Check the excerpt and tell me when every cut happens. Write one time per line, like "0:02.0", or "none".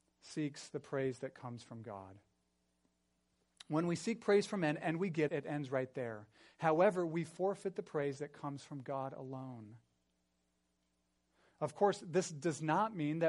0:05.3